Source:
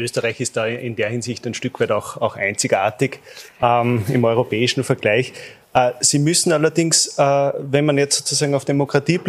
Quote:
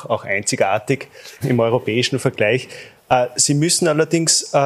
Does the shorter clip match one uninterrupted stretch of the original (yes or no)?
no